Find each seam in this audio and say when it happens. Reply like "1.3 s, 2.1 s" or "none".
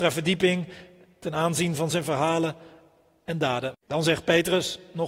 3.7 s